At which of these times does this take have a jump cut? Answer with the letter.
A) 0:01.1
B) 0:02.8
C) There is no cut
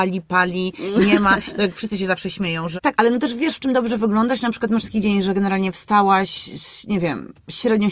B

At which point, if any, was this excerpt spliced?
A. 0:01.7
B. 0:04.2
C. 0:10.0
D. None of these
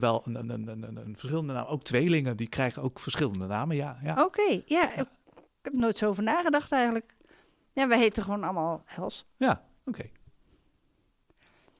D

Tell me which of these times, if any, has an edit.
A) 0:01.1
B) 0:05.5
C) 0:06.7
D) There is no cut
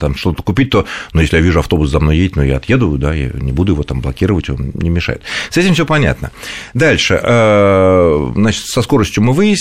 D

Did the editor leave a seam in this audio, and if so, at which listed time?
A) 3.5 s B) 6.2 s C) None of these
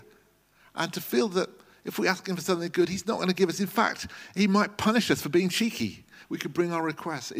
B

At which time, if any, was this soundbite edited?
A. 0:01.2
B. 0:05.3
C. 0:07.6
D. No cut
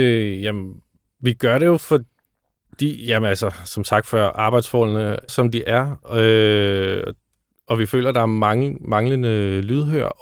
B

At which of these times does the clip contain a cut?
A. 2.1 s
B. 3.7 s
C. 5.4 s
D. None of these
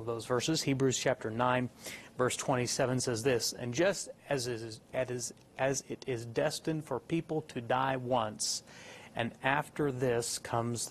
D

